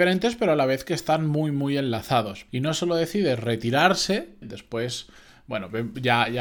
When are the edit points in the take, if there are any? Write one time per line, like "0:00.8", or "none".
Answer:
0:02.5
0:04.4